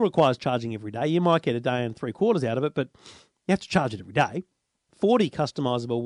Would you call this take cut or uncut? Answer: cut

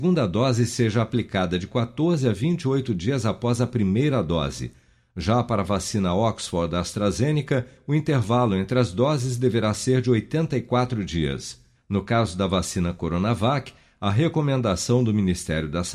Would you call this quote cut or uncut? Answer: cut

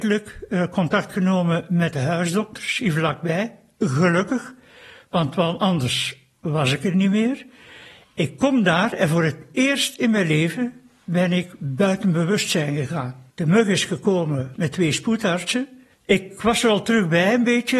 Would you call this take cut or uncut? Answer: cut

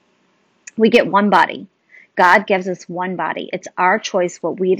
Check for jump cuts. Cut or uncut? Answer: uncut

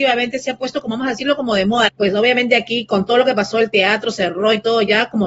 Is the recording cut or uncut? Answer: cut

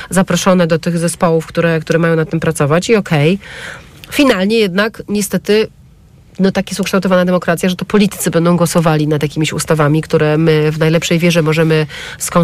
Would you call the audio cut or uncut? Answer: uncut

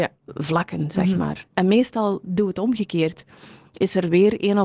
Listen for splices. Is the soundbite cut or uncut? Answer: uncut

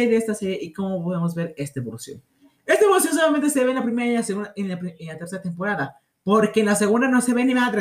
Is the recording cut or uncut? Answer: uncut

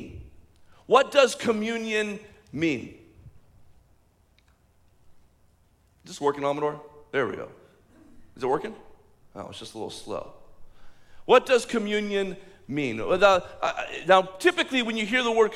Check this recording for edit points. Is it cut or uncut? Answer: uncut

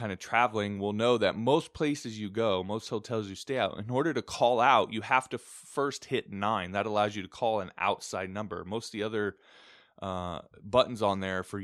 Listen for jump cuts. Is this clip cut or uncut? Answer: uncut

